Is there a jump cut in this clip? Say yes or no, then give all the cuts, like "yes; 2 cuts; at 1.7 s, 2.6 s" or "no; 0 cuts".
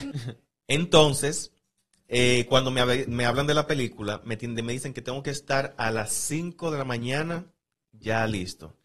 no; 0 cuts